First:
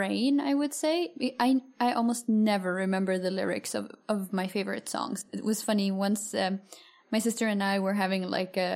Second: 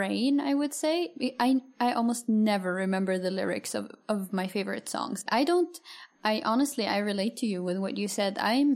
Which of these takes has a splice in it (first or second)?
second